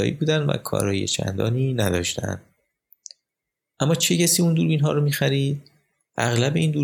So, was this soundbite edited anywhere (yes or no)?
no